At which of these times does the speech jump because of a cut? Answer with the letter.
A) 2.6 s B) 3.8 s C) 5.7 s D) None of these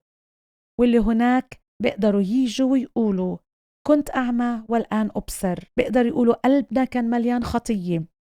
C